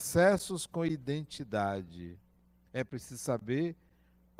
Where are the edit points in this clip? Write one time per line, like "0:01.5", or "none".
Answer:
none